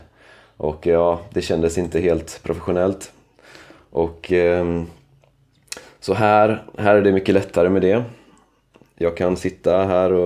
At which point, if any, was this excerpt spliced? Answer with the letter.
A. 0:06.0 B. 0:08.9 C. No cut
C